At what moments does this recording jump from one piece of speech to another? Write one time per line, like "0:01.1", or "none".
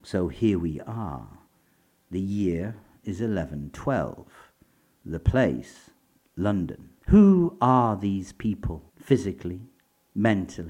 0:07.0
0:08.9